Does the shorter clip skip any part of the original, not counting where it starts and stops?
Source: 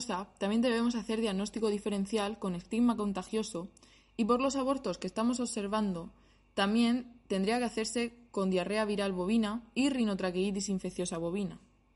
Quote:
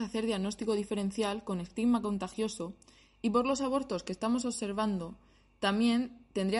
no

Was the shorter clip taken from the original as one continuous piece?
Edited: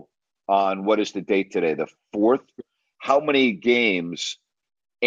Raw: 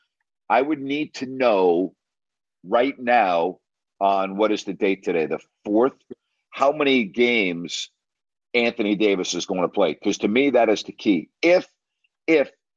yes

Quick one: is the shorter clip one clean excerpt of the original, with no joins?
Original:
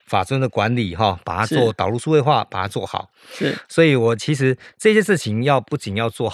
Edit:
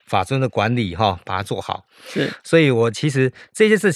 no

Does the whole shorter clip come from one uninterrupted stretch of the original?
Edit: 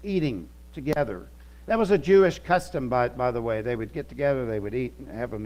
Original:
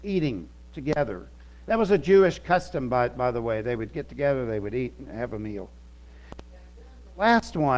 yes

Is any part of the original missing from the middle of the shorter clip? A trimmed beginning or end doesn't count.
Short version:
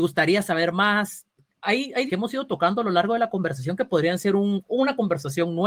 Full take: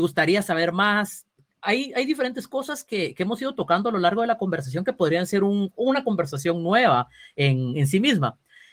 yes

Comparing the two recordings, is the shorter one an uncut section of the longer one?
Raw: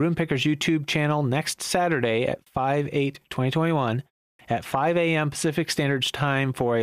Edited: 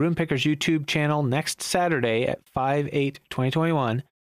yes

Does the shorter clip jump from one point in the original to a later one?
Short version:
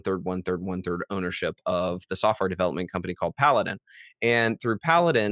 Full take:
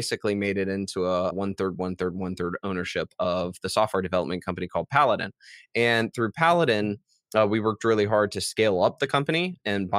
no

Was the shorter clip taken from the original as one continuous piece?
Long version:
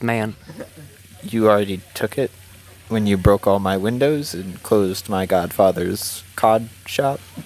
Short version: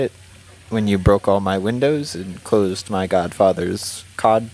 yes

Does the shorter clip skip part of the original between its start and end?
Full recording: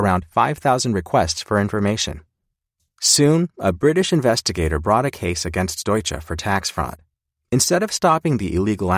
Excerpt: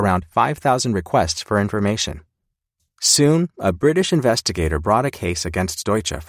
no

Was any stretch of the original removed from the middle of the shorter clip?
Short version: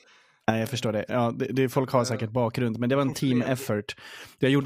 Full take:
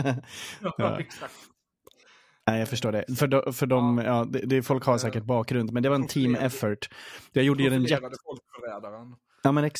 yes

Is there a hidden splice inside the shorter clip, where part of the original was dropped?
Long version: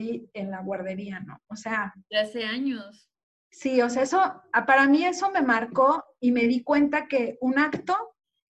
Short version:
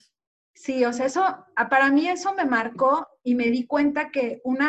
no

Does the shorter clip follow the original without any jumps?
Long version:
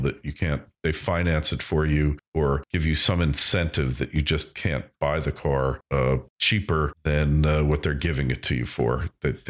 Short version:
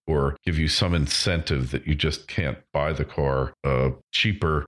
yes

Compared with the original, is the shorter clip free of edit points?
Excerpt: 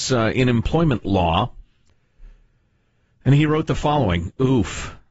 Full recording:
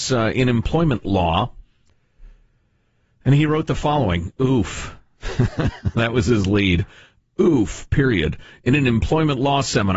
yes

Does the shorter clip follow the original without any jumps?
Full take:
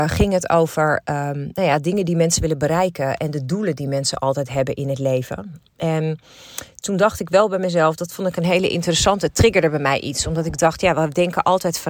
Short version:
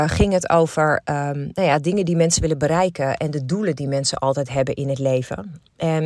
yes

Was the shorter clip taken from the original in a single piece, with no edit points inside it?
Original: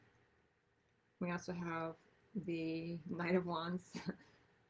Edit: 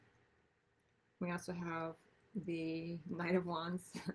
yes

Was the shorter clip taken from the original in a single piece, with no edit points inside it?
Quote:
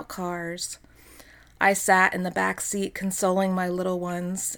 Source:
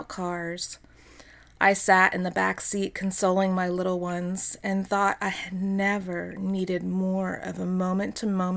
yes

